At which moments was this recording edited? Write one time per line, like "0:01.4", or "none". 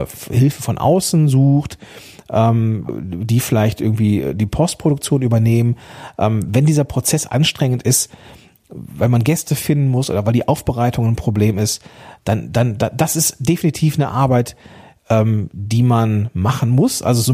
0:12.2